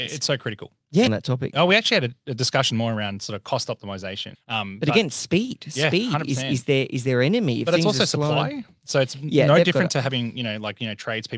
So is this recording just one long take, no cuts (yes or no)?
no